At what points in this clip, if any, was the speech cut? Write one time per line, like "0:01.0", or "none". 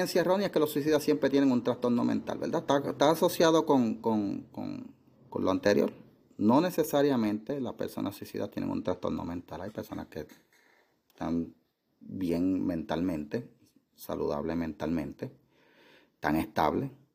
none